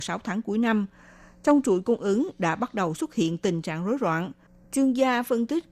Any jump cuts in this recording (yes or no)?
yes